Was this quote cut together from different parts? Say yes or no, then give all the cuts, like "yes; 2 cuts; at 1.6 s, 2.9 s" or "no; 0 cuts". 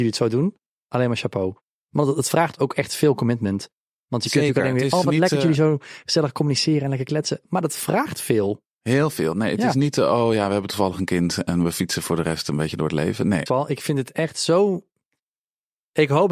yes; 1 cut; at 13.5 s